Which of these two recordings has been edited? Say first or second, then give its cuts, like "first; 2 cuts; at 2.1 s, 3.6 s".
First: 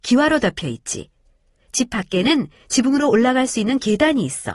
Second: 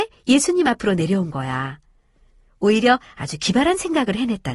second; 1 cut; at 2.5 s